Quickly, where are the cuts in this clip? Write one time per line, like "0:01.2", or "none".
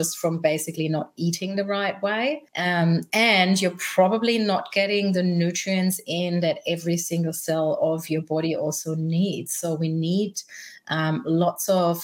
0:02.5